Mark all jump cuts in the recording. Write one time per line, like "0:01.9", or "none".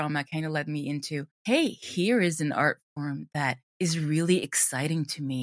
none